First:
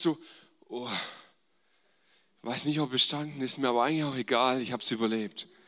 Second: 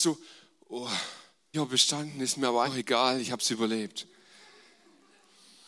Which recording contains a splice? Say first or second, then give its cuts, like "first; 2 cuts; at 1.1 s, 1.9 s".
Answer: second; 2 cuts; at 1.5 s, 2.6 s